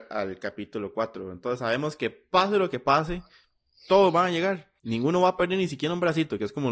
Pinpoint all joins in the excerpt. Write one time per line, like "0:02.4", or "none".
0:04.8